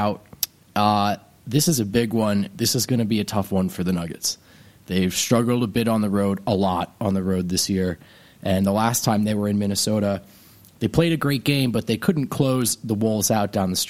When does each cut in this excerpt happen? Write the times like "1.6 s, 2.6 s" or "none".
none